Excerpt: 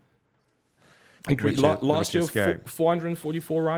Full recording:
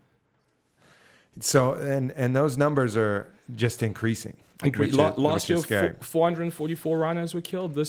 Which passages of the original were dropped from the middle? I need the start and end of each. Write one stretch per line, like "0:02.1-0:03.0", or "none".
0:01.2-0:04.5